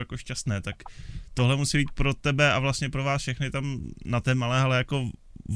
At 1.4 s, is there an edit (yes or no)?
no